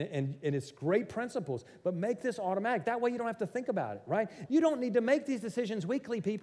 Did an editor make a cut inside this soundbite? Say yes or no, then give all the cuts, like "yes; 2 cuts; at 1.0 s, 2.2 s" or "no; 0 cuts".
yes; 1 cut; at 4.5 s